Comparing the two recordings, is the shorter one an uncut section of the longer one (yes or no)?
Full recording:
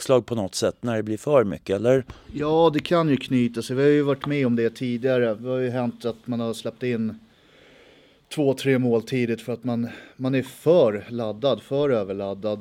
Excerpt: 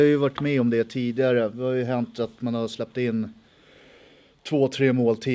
yes